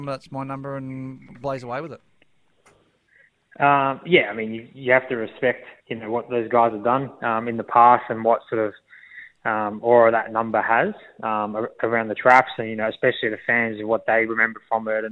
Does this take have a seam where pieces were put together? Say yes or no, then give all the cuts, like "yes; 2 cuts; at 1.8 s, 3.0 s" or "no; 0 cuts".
yes; 1 cut; at 5.8 s